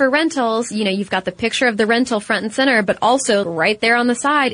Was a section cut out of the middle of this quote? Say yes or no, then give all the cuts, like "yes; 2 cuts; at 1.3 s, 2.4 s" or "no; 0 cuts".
yes; 1 cut; at 3.4 s